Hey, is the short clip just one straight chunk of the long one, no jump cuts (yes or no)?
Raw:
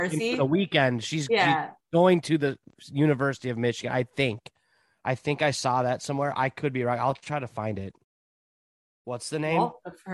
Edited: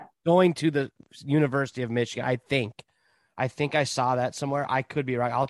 yes